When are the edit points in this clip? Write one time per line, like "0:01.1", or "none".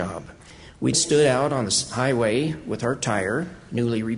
0:00.9